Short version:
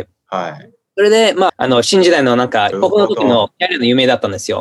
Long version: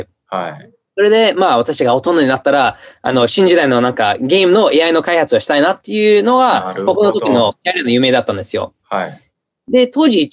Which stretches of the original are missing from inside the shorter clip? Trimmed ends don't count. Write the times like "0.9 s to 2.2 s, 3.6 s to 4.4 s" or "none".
1.5 s to 2.9 s, 4.2 s to 6.8 s